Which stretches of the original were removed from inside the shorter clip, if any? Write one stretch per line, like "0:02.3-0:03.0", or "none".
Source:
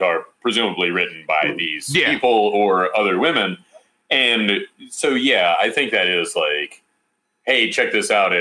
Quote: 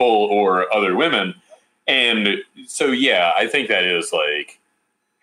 none

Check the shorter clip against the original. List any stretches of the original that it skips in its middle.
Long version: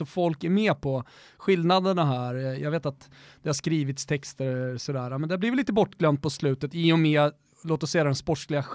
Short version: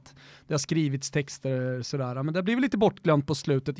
none

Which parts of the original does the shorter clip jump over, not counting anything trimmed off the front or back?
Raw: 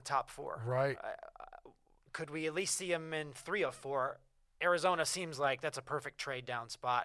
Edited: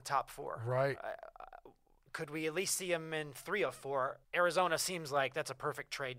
0:04.2-0:04.5

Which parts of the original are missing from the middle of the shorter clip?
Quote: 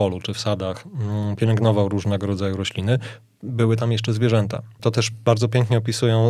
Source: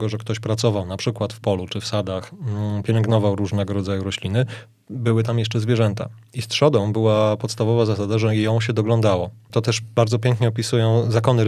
0:06.2-0:09.4

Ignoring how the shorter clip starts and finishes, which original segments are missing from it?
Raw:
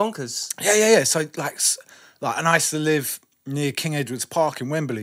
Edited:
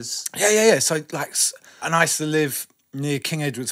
0:02.1-0:02.3

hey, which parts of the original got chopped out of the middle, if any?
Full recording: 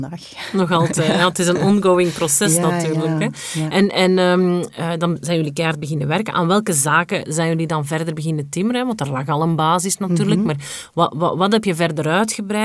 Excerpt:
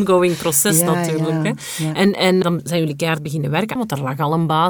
0:04.2-0:05.0
0:06.3-0:08.8

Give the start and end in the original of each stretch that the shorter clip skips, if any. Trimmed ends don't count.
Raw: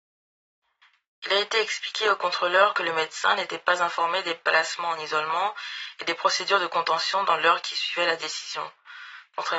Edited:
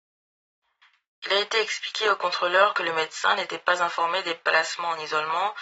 none

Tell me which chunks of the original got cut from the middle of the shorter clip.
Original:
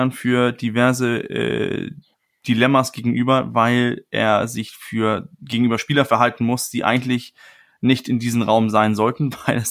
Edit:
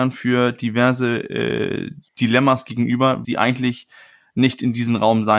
0:02.1-0:02.4
0:03.5-0:06.7

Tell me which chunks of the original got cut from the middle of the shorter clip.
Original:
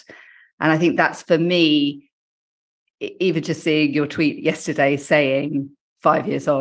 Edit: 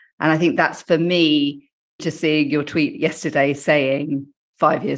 0:02.4-0:03.4

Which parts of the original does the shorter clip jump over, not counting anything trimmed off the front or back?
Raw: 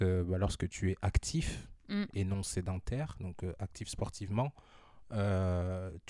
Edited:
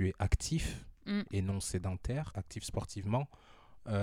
0:03.1-0:03.5

